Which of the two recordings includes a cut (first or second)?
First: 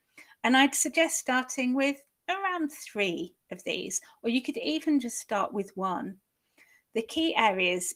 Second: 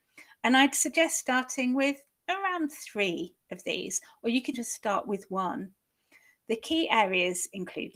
second